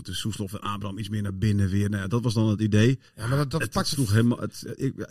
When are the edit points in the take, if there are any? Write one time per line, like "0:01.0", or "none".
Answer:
0:03.1